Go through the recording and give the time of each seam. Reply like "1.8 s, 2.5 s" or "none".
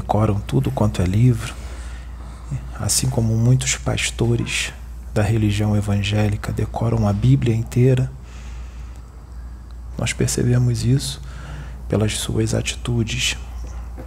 9.9 s